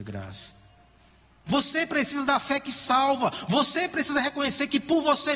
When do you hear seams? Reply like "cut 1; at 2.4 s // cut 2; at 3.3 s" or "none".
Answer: cut 1; at 1.5 s